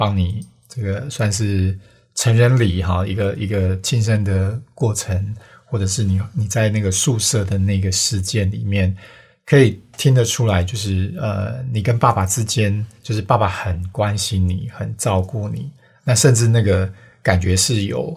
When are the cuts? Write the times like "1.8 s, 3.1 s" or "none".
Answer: none